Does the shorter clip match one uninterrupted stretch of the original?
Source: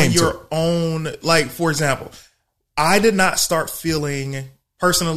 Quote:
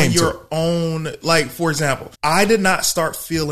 no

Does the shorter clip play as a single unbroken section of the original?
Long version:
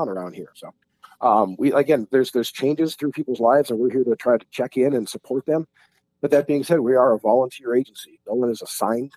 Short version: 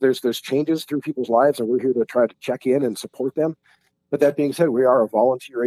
yes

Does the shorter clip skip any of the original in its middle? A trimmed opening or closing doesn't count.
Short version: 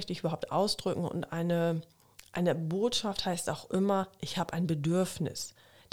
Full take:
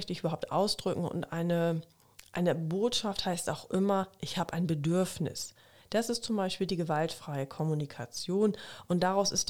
no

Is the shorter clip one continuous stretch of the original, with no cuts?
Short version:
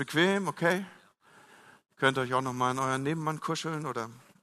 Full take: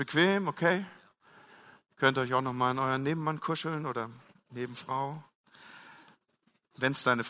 yes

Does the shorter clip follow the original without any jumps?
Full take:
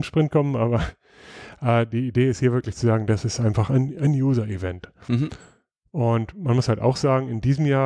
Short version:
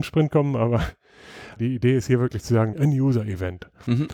no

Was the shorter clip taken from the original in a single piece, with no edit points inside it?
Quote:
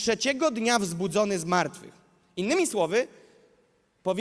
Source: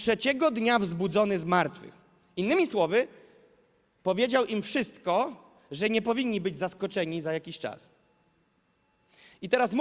yes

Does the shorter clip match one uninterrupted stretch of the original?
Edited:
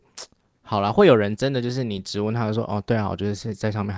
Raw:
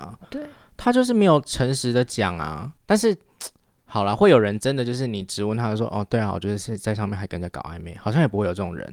yes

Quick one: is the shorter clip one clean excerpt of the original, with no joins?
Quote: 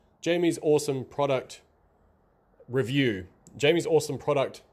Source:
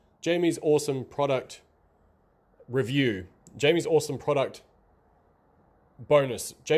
yes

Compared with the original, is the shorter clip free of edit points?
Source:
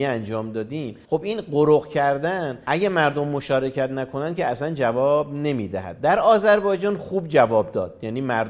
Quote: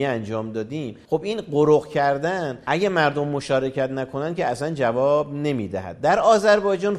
yes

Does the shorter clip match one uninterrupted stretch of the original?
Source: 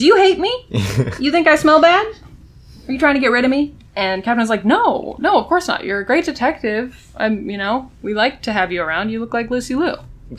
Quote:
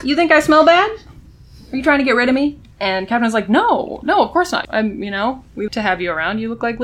no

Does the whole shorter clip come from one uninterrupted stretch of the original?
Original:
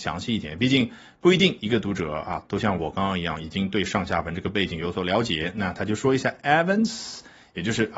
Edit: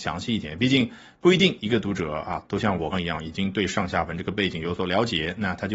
no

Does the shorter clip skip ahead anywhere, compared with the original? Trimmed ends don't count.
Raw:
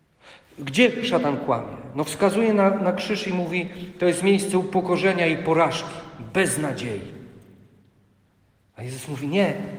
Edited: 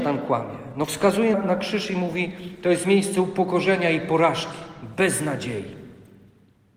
yes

